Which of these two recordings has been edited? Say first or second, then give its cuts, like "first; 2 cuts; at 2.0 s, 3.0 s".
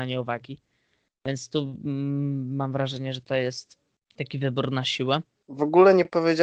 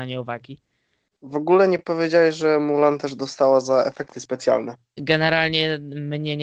second; 2 cuts; at 1.1 s, 5.0 s